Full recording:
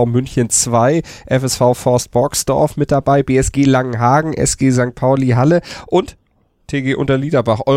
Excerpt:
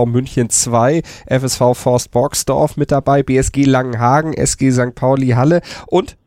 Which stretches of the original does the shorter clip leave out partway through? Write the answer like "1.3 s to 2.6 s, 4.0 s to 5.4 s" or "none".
none